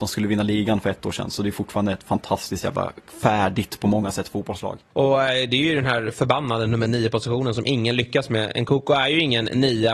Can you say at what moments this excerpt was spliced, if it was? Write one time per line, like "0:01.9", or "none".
0:04.9